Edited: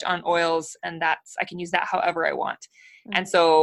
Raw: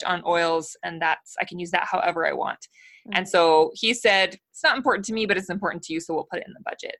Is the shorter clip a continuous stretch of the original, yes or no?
yes